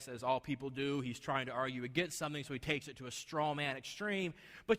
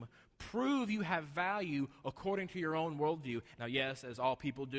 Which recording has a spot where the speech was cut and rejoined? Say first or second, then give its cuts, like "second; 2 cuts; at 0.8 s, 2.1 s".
second; 1 cut; at 3.5 s